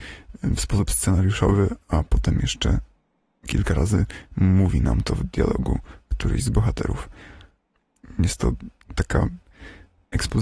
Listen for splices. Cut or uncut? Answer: uncut